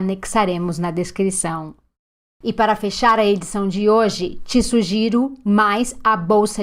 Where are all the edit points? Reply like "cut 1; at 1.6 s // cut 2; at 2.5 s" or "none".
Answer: cut 1; at 2.4 s